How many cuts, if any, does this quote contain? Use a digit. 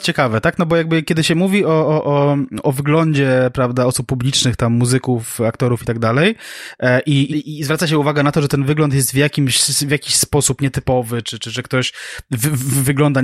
1